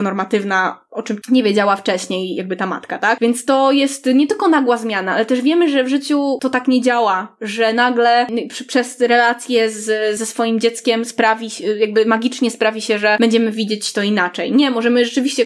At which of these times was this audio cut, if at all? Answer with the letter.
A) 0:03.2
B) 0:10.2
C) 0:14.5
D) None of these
D